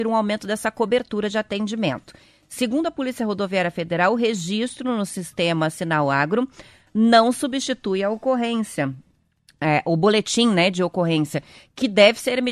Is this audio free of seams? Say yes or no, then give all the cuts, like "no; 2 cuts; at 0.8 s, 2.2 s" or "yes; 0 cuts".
yes; 0 cuts